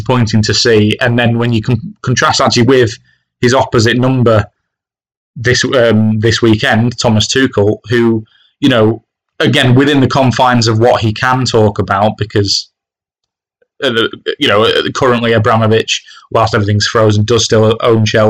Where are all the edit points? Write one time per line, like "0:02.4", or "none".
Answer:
none

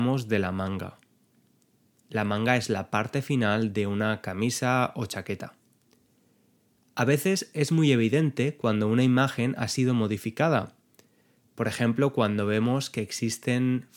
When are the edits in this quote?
none

